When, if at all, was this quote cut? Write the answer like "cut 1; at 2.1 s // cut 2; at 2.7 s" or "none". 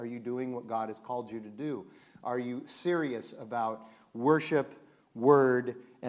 none